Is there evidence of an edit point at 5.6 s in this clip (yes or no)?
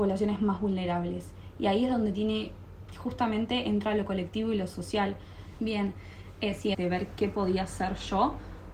yes